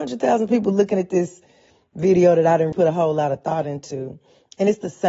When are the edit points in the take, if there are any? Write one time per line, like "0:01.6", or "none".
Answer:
0:02.7